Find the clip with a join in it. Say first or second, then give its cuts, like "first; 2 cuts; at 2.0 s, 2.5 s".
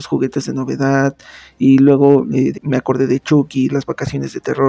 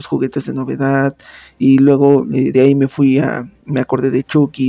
first; 2 cuts; at 2.5 s, 3.7 s